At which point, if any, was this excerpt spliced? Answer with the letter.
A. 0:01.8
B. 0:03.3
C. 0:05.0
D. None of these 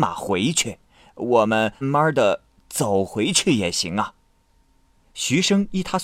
A